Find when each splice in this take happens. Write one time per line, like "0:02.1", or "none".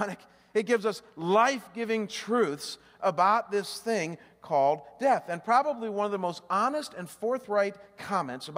none